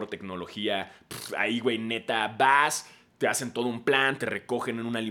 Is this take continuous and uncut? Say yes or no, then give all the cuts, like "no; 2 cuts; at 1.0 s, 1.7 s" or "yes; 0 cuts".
yes; 0 cuts